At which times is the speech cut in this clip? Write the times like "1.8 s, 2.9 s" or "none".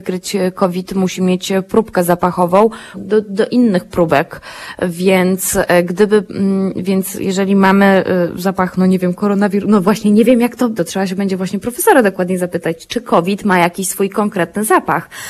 2.9 s, 10.8 s